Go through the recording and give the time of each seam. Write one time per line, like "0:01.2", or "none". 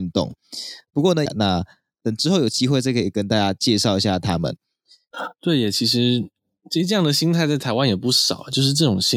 0:01.3
0:05.1